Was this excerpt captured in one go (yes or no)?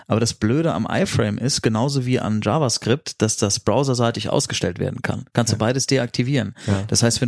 yes